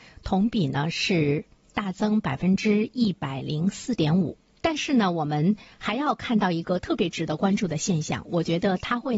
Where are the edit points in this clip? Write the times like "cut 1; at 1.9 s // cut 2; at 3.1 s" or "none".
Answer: cut 1; at 4.5 s